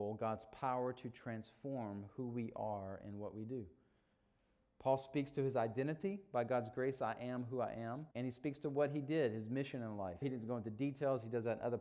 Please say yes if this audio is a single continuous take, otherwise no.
no